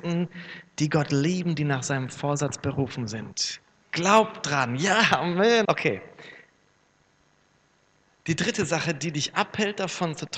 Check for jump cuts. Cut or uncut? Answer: cut